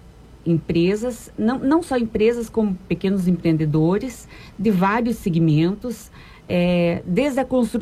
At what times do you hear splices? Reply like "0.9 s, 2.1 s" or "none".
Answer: none